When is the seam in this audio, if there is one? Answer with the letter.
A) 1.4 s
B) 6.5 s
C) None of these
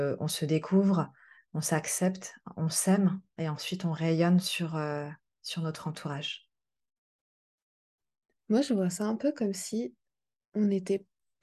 C